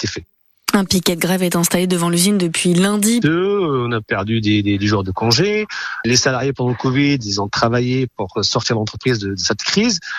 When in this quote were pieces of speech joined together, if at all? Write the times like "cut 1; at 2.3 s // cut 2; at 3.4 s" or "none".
cut 1; at 3.2 s